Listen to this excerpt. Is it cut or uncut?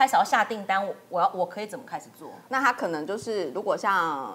cut